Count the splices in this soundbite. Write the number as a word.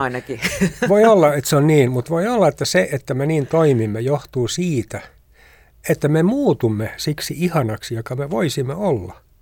zero